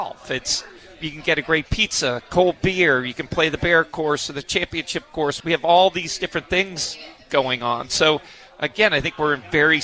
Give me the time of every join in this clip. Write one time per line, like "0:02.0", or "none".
0:05.4